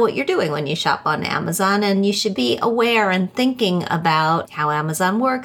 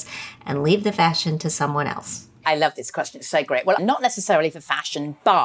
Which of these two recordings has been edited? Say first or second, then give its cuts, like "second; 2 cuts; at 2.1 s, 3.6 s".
second; 1 cut; at 3.8 s